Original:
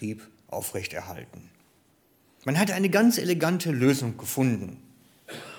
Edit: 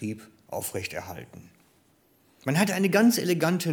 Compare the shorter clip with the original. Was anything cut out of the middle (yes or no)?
no